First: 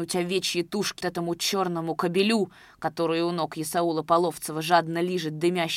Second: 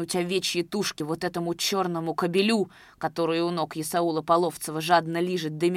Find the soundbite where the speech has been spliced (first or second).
first